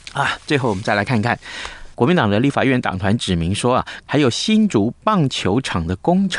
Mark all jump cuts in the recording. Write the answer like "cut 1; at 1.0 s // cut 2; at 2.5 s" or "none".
cut 1; at 1.9 s // cut 2; at 4.1 s